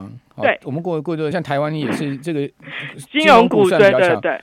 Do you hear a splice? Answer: yes; 1 cut; at 1.3 s

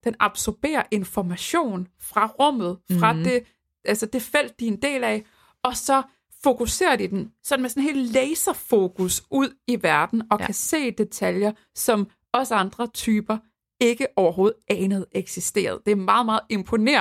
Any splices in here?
no; 0 cuts

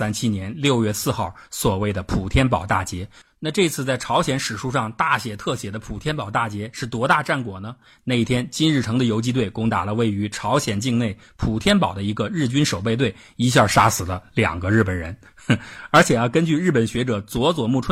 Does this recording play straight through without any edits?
yes; 0 cuts

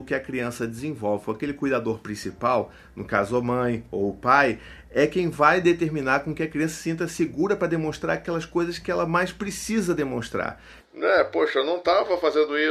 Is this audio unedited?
no; 1 cut; at 10.8 s

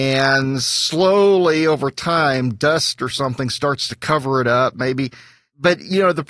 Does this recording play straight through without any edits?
yes; 0 cuts

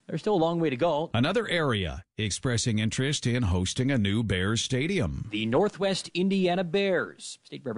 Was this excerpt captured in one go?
no; 1 cut; at 1.1 s

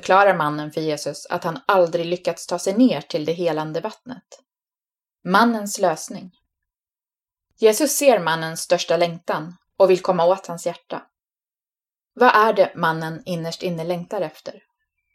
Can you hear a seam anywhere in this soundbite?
yes; 1 cut; at 5.2 s

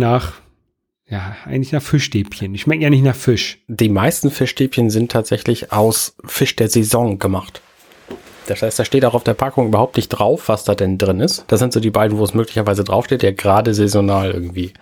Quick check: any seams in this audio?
yes; 2 cuts; at 11.5 s, 13.2 s

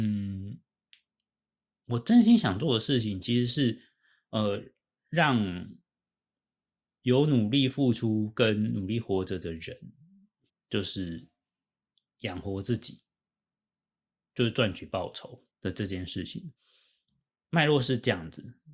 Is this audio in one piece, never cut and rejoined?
no; 2 cuts; at 10.5 s, 15.5 s

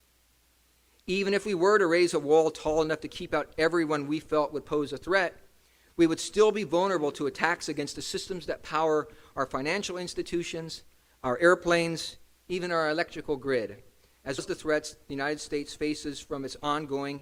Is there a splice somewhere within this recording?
yes; 1 cut; at 14.4 s

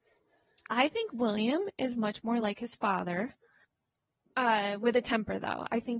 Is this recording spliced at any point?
no; 0 cuts

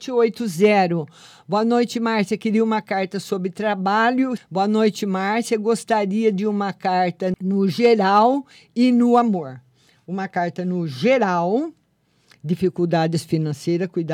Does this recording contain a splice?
yes; 2 cuts; at 4.4 s, 7.3 s

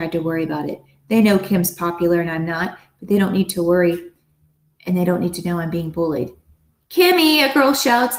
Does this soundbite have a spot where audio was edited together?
no; 0 cuts

